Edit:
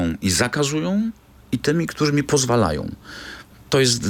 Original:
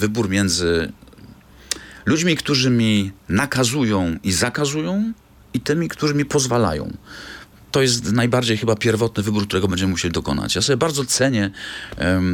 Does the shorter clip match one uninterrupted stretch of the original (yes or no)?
yes